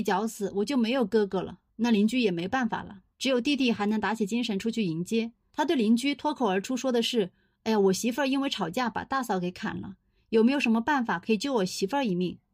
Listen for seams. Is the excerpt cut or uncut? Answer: cut